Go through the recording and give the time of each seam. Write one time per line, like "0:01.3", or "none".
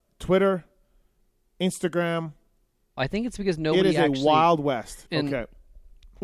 0:03.0
0:05.1